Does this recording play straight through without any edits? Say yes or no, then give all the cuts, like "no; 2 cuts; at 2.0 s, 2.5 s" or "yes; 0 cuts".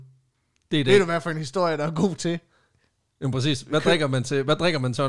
yes; 0 cuts